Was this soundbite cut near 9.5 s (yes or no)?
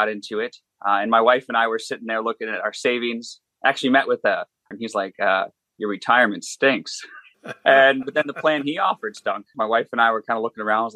yes